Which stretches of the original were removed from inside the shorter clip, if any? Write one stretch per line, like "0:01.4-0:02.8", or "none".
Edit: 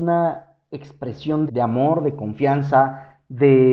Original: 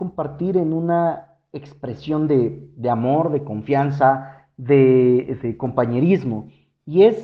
0:02.3-0:02.7